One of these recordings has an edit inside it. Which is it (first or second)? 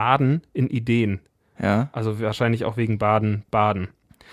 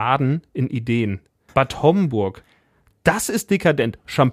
second